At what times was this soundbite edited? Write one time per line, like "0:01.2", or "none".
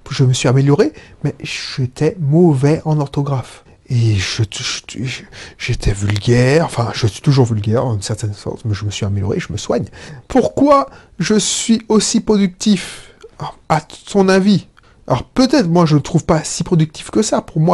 0:10.2